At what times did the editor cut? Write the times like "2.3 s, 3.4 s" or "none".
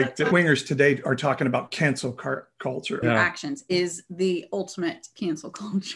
3.0 s

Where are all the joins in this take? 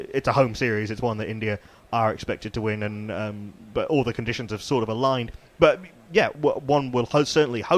none

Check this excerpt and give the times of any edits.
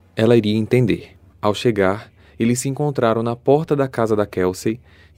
1.3 s

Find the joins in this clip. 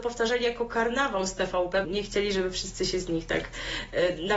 1.8 s

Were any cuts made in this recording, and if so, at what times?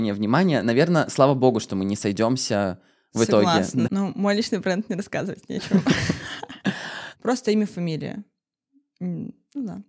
3.8 s, 7.1 s

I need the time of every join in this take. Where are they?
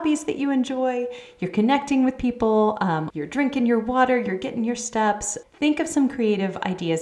3.1 s, 5.4 s

